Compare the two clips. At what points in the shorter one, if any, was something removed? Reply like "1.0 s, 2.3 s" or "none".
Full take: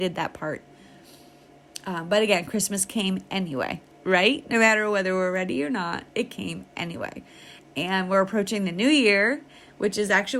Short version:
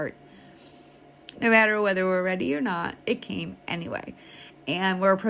1.3 s

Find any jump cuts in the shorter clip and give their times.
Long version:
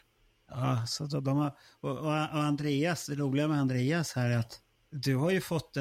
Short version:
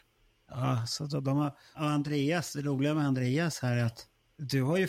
1.7 s

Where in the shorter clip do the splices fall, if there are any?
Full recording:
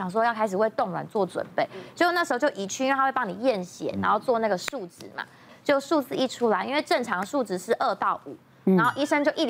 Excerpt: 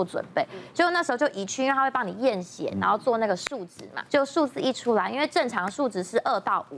4.1 s

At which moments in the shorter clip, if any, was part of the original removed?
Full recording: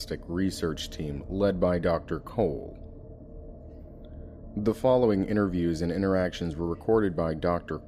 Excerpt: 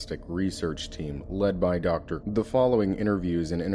2.2 s

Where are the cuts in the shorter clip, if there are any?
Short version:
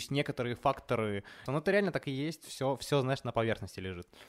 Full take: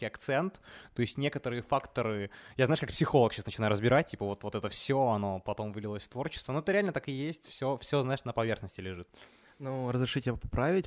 1.5 s

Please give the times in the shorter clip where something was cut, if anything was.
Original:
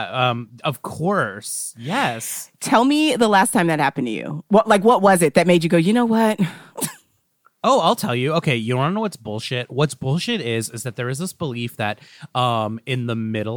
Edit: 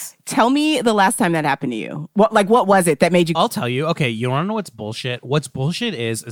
3.3 s

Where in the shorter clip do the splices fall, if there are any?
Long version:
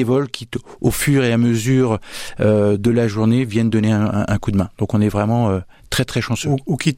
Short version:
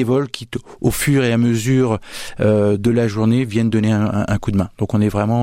none

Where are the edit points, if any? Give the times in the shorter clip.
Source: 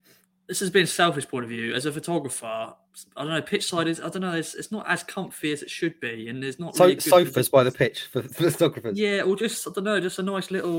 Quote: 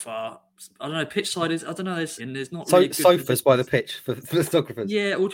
2.2 s

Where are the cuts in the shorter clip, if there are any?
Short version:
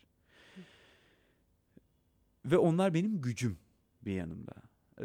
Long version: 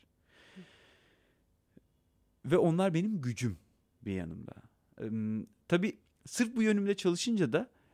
none

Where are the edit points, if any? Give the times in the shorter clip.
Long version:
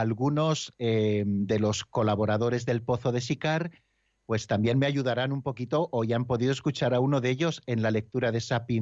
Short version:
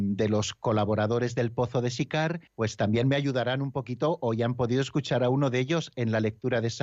2.5 s

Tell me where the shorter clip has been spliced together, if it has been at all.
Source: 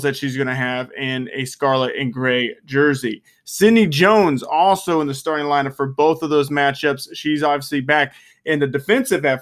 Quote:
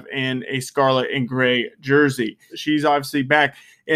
2.5 s

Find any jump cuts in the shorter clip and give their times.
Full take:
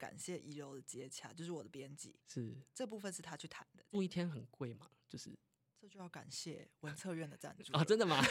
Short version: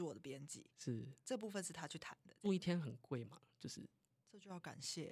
none

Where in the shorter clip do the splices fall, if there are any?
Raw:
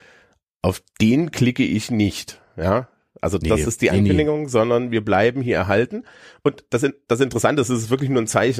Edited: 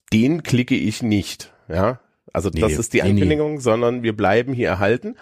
none

